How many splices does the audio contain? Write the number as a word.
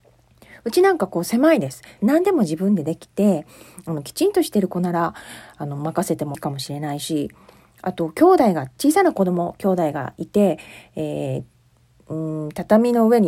two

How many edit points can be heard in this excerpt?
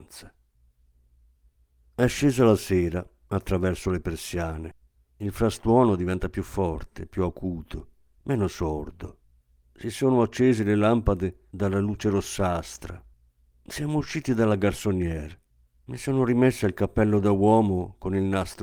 zero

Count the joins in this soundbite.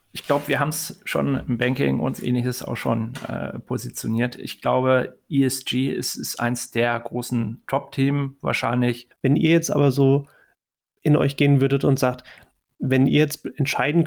one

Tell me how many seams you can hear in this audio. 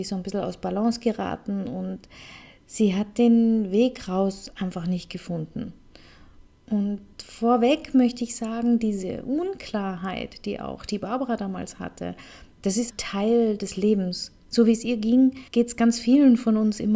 two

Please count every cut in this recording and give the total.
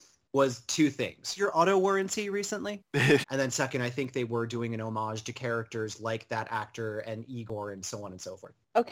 two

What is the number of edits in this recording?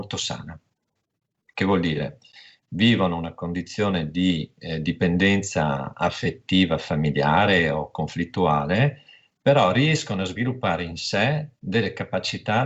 zero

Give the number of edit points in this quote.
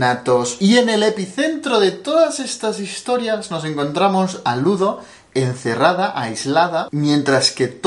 one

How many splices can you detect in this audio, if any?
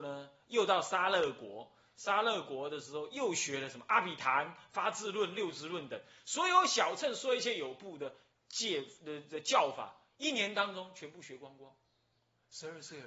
zero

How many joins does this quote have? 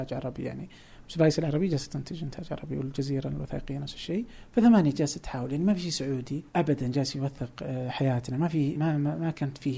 two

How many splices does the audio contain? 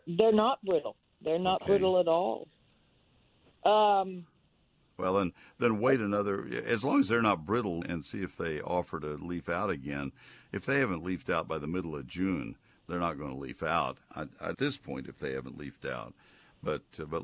two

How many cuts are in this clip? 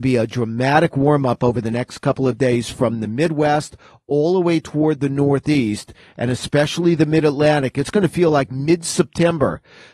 zero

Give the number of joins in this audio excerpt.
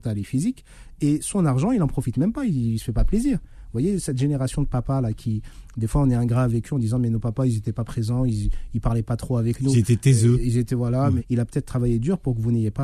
one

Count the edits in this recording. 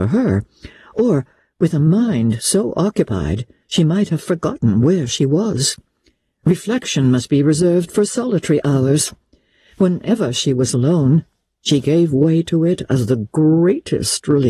zero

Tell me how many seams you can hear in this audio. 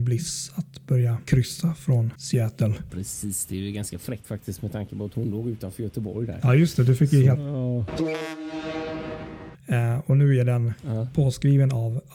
two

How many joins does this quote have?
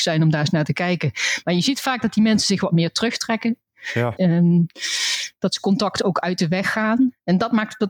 one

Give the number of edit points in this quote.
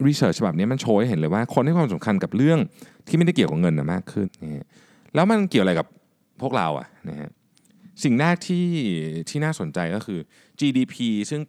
one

